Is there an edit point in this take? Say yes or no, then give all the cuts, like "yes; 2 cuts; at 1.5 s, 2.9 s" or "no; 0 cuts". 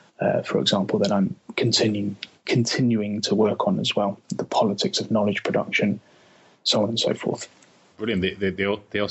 no; 0 cuts